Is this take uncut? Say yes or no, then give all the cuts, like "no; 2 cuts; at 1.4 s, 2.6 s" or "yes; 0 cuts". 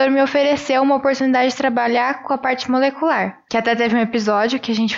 yes; 0 cuts